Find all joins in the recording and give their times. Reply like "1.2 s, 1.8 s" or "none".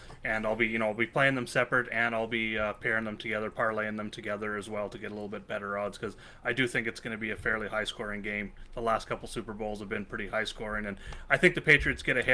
none